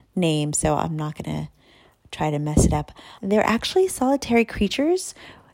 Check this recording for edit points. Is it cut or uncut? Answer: cut